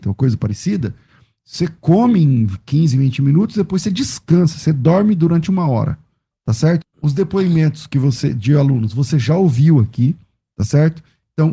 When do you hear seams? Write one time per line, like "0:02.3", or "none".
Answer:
0:06.8

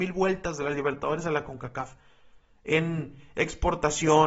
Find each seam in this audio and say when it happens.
none

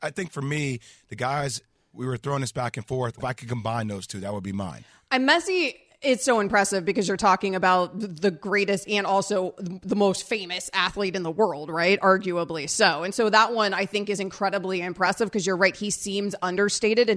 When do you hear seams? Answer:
0:03.2

